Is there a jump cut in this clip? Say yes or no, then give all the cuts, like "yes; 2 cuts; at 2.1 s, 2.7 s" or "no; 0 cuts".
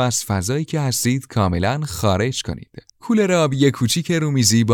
yes; 1 cut; at 2.9 s